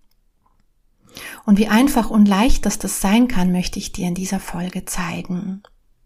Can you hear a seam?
no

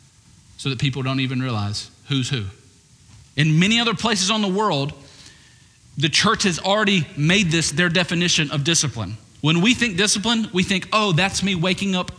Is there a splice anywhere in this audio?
yes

